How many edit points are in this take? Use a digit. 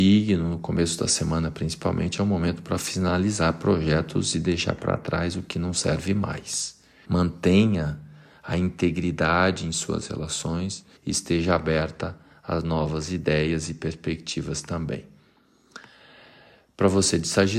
2